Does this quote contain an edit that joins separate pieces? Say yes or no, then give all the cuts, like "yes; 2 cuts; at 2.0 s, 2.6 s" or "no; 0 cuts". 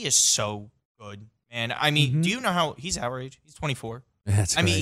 no; 0 cuts